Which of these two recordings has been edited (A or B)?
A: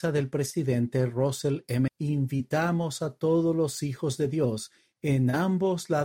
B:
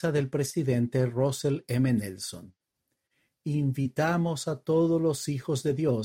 A